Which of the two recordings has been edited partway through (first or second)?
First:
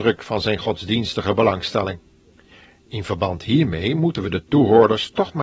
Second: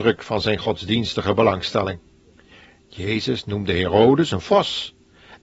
first